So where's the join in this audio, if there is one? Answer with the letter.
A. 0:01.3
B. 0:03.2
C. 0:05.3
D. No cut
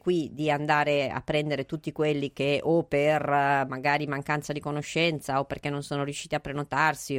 D